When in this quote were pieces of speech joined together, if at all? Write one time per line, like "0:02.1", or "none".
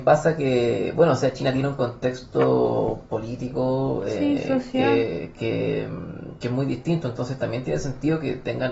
none